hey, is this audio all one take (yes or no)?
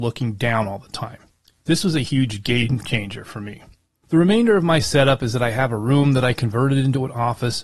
yes